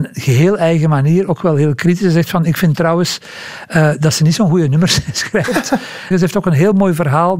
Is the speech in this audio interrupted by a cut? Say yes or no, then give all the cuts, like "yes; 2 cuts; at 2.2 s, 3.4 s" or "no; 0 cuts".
yes; 1 cut; at 6.1 s